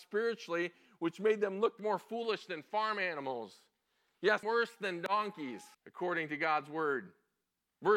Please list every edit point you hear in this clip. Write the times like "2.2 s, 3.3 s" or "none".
4.4 s, 5.7 s